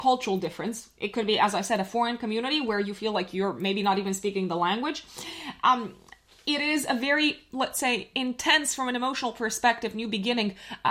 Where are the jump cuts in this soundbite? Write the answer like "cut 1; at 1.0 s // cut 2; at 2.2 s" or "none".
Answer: none